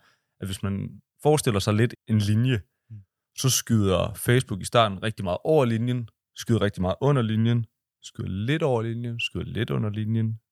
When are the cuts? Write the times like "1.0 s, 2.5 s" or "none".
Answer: 2.0 s